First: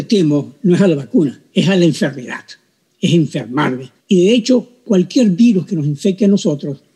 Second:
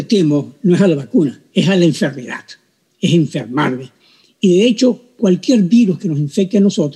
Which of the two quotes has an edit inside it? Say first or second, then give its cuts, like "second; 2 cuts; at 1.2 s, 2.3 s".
first; 1 cut; at 4.0 s